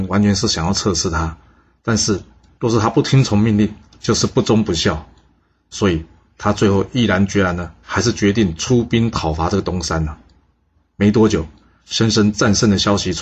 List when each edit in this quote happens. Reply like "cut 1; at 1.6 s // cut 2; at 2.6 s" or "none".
none